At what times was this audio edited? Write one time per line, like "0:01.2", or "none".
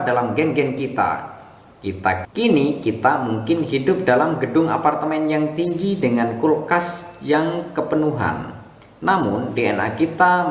0:02.2